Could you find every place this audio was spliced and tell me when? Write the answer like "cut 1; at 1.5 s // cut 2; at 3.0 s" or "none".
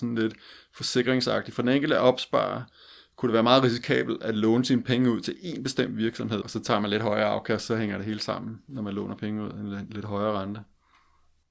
cut 1; at 6.4 s